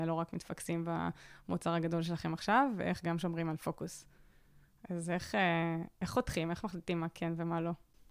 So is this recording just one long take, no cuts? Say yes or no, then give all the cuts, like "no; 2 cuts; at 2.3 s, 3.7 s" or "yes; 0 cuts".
yes; 0 cuts